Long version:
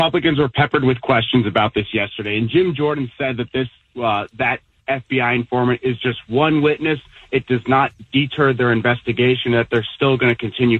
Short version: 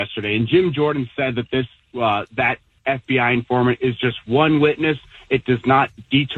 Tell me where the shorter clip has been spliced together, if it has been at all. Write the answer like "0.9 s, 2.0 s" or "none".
none